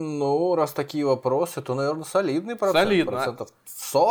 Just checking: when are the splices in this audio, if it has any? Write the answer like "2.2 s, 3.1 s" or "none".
none